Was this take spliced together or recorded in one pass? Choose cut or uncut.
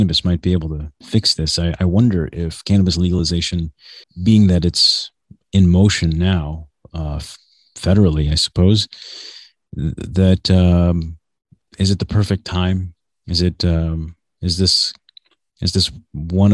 cut